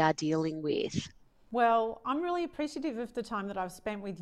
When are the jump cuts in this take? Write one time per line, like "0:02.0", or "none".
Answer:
none